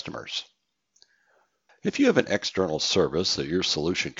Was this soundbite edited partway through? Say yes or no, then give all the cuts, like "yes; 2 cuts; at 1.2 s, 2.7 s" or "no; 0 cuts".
yes; 1 cut; at 1.7 s